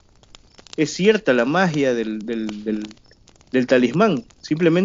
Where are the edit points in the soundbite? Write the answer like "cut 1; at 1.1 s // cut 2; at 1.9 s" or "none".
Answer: none